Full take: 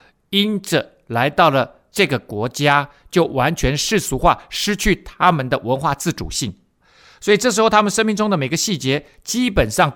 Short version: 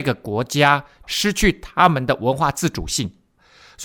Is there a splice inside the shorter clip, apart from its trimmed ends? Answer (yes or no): yes